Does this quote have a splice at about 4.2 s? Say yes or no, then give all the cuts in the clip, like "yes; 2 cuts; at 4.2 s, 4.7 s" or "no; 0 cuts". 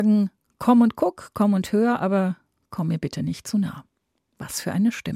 no; 0 cuts